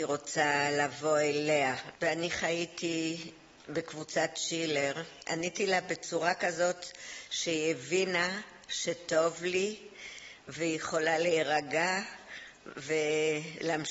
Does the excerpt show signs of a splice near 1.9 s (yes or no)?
yes